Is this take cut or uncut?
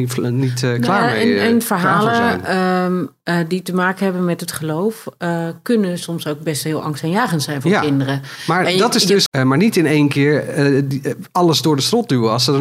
cut